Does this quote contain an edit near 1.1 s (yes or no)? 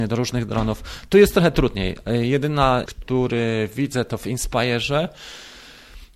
no